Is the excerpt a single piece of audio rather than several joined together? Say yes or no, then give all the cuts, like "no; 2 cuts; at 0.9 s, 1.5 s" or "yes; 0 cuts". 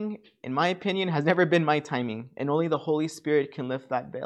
yes; 0 cuts